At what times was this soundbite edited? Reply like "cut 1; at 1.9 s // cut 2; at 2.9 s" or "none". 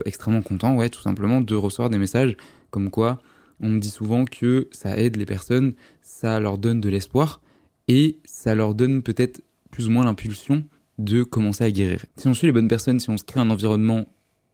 cut 1; at 12.1 s